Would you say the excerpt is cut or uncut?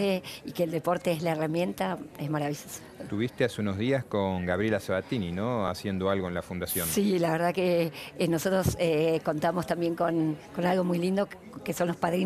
uncut